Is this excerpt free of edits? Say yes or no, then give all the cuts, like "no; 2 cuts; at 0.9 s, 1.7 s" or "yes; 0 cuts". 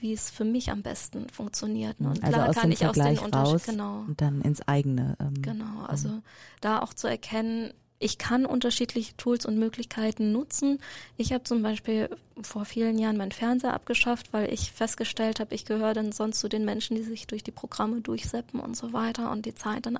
yes; 0 cuts